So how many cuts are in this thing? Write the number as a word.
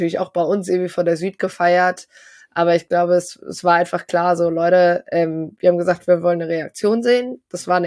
zero